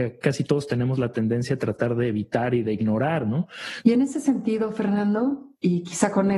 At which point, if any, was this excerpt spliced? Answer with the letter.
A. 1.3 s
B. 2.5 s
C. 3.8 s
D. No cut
C